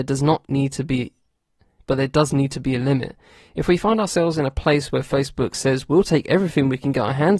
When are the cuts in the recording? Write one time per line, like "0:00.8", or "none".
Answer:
none